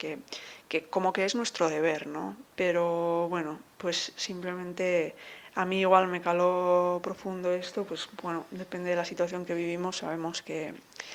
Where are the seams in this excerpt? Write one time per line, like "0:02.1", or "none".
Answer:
0:02.4